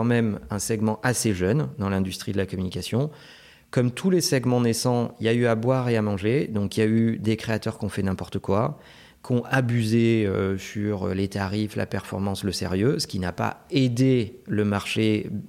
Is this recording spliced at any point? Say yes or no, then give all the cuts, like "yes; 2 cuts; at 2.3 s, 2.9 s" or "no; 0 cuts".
no; 0 cuts